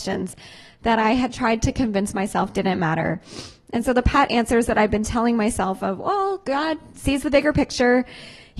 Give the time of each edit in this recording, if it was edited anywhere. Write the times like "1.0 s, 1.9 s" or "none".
none